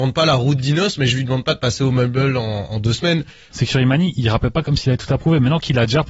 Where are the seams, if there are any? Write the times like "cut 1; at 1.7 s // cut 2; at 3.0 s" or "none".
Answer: cut 1; at 3.5 s